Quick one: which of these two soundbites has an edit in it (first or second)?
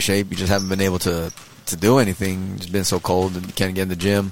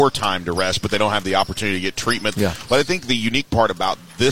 second